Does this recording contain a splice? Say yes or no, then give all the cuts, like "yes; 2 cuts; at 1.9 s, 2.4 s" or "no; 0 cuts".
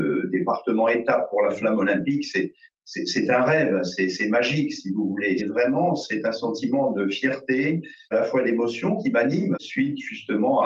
yes; 3 cuts; at 5.4 s, 8.1 s, 9.5 s